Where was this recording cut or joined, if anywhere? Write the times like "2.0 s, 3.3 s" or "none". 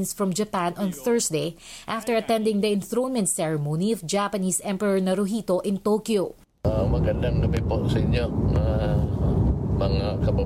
none